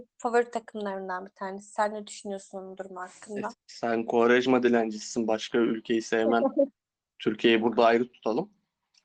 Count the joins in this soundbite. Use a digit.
1